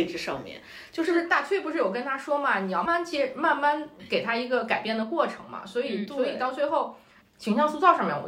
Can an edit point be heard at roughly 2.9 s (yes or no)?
yes